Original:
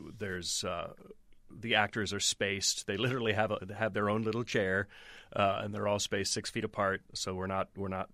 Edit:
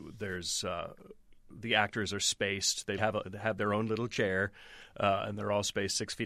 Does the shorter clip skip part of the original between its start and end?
yes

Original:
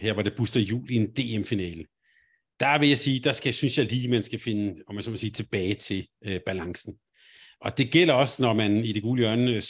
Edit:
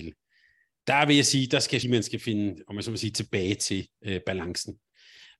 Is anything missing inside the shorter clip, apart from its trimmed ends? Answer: yes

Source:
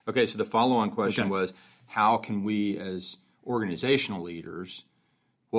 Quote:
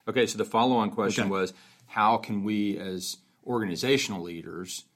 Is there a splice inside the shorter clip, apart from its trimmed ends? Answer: no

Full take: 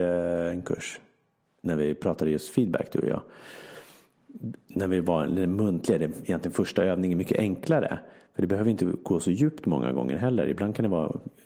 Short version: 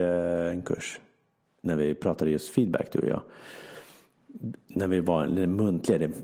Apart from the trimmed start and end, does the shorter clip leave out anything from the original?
no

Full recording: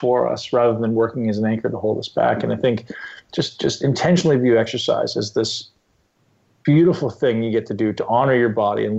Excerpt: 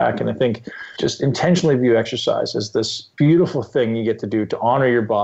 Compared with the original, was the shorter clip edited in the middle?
yes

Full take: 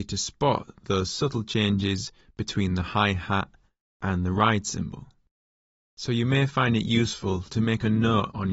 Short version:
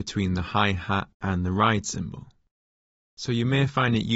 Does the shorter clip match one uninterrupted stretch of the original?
no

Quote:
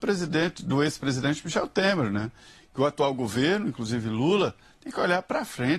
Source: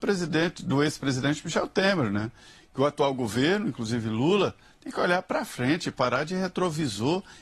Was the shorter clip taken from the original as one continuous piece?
yes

